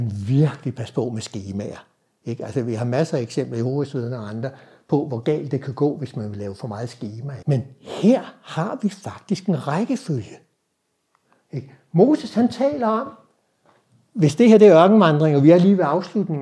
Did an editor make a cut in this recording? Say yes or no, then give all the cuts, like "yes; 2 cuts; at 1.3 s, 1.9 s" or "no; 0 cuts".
yes; 1 cut; at 7.4 s